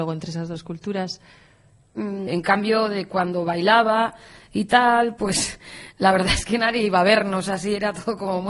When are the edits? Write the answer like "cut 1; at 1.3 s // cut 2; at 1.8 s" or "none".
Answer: cut 1; at 2.3 s